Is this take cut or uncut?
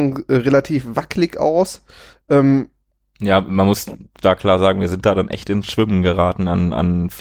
uncut